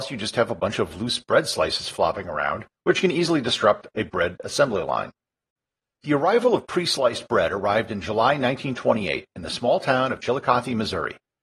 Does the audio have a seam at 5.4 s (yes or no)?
no